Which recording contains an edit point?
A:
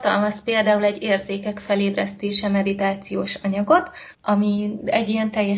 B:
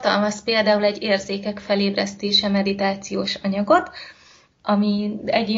A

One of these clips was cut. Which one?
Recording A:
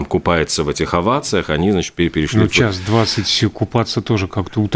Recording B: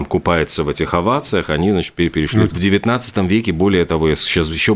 B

